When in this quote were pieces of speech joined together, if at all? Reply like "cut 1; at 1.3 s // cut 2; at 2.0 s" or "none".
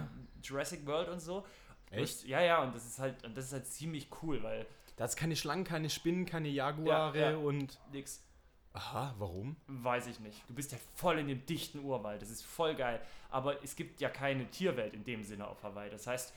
cut 1; at 1.8 s // cut 2; at 10.4 s